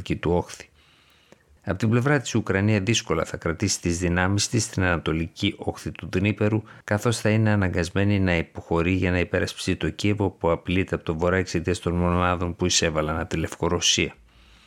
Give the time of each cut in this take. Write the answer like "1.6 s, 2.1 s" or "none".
1.6 s, 6.8 s